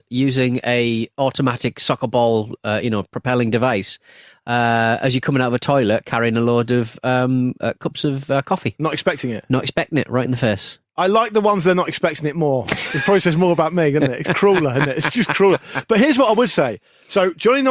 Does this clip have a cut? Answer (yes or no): no